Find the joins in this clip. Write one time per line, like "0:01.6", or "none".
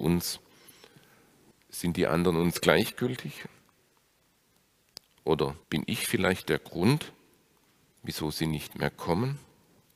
0:01.5
0:05.6